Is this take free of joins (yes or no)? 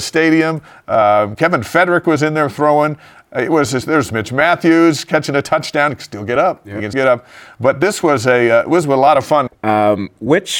no